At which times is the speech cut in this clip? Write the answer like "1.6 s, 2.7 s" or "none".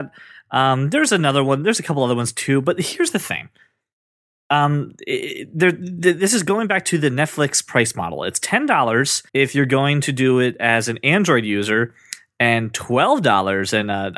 9.3 s